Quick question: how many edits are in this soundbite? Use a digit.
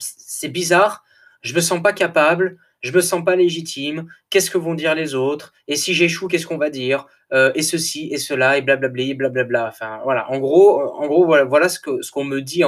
0